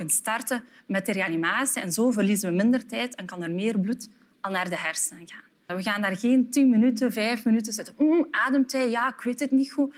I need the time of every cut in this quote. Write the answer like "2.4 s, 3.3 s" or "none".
5.7 s